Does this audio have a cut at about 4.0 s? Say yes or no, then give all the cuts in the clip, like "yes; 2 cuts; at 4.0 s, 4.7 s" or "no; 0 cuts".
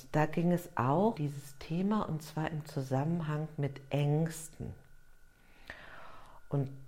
no; 1 cut; at 1.1 s